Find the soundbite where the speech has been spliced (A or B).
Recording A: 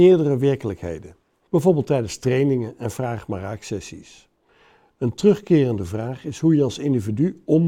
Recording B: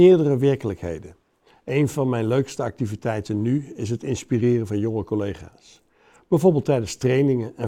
A